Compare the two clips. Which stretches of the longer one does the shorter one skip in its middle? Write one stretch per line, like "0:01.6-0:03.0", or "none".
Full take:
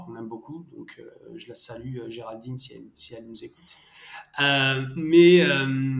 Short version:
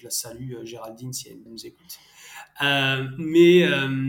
0:02.9-0:03.2